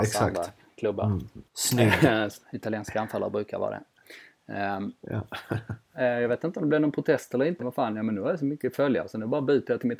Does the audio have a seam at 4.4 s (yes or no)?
no